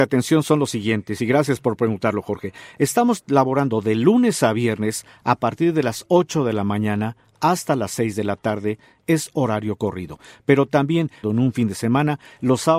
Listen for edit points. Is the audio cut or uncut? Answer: cut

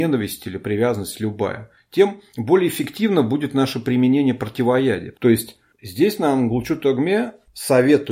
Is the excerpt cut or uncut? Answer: cut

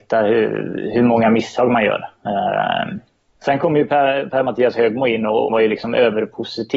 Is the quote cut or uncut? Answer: cut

